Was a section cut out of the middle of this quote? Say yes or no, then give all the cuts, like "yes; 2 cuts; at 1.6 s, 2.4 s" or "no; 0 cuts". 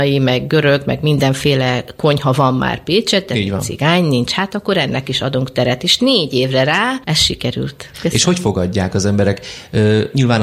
yes; 1 cut; at 7.9 s